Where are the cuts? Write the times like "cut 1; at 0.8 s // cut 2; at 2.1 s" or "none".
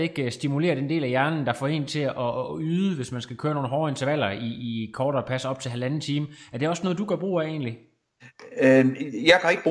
none